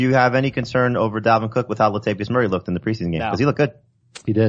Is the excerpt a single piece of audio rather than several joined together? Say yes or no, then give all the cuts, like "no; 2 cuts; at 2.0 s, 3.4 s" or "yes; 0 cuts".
yes; 0 cuts